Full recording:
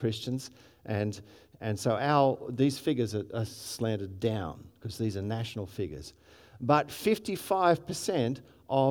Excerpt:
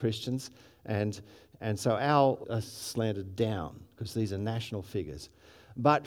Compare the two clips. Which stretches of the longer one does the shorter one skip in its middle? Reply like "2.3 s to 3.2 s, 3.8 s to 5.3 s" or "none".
2.4 s to 3.3 s

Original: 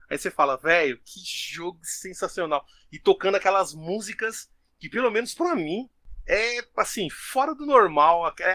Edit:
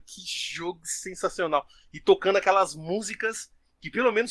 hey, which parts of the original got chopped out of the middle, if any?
none

